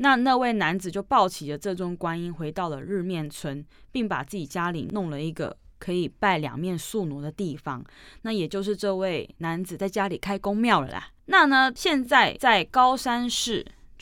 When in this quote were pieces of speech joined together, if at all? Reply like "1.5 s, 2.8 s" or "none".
none